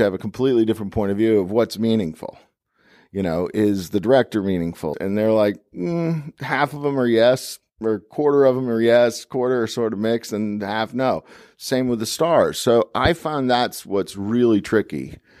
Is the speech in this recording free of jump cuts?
no; 1 cut; at 4.9 s

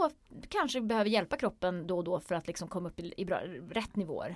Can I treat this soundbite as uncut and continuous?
yes; 0 cuts

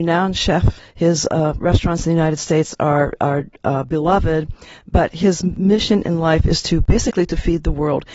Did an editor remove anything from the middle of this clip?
no; 0 cuts

